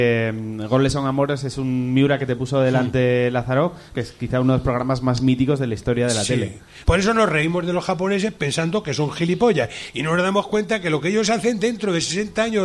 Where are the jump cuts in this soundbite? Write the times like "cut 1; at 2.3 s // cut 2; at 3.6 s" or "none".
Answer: cut 1; at 3.9 s // cut 2; at 6.8 s